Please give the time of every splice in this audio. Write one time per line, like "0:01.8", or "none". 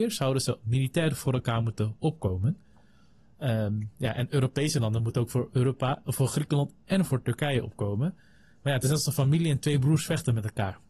none